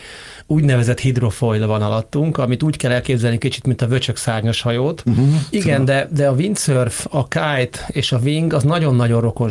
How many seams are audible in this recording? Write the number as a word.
one